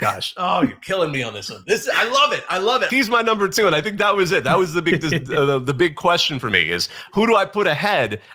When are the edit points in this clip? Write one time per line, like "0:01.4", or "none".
0:02.9